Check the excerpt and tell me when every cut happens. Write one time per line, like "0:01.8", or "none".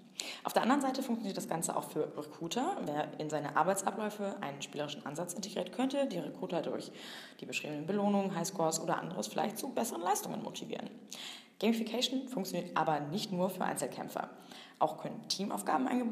none

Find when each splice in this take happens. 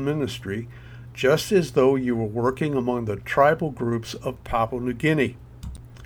none

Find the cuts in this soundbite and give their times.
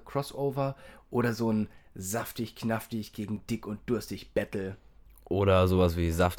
none

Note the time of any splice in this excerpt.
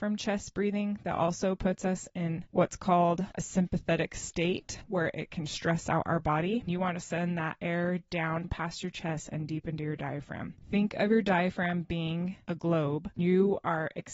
none

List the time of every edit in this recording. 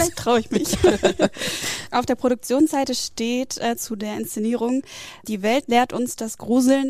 none

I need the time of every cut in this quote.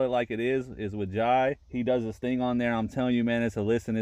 0:01.6

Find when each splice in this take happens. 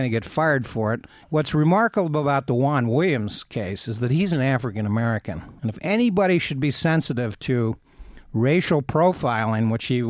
0:01.2

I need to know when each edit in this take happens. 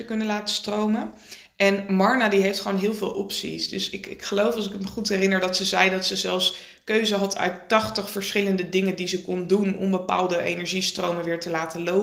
none

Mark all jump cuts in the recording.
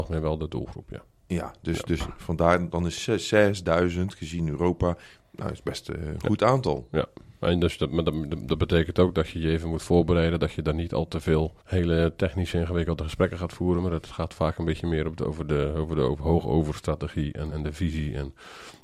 0:11.6
0:17.5

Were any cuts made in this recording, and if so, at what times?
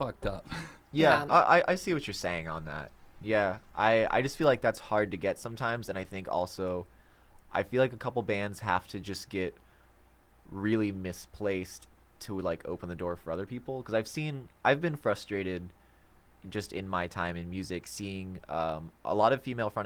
none

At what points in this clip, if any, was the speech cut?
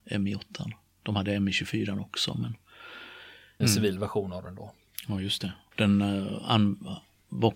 0:03.6
0:05.7

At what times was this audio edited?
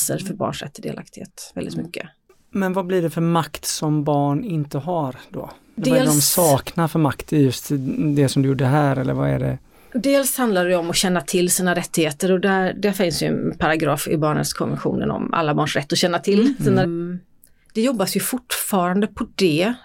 0:16.8

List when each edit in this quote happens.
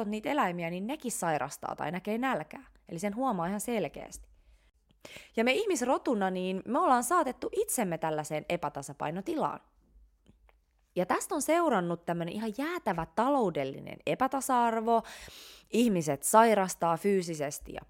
0:10.9

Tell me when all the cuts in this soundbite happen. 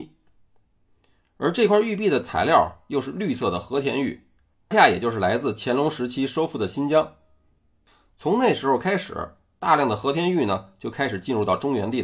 0:04.7

